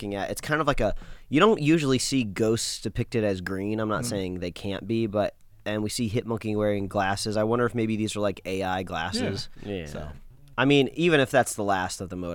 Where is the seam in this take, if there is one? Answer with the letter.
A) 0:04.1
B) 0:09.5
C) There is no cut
B